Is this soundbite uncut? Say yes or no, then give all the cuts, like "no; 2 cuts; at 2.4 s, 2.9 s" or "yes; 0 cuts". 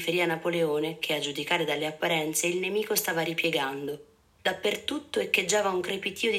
no; 1 cut; at 4.4 s